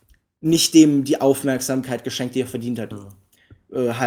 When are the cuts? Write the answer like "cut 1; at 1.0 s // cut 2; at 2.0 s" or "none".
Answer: cut 1; at 2.9 s